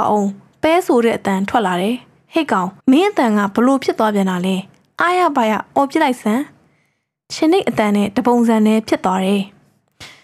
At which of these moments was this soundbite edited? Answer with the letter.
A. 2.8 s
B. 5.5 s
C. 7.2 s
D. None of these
A